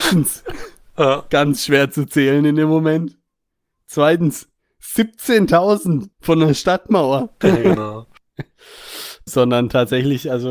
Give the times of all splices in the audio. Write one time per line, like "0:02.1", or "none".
0:06.1
0:07.4
0:09.3